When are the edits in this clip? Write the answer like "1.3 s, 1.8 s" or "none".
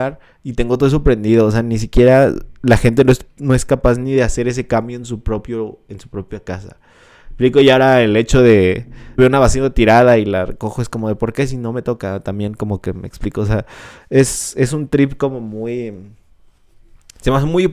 9.2 s